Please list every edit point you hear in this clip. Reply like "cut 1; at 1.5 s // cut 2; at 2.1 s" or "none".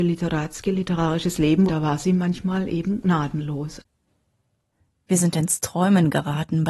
cut 1; at 1.7 s